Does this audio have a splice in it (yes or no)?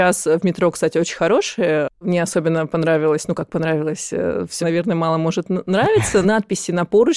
yes